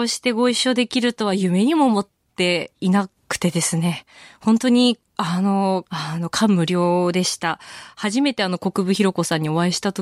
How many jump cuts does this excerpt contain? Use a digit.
1